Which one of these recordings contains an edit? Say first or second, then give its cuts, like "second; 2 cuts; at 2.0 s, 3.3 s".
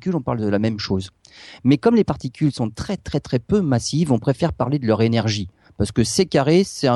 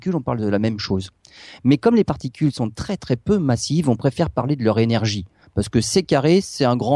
second; 1 cut; at 3.0 s